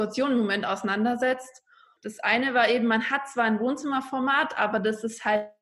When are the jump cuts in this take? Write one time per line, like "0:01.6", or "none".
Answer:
0:02.0